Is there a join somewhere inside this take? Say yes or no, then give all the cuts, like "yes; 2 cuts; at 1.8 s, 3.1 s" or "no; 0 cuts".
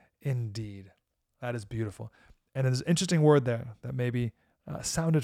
no; 0 cuts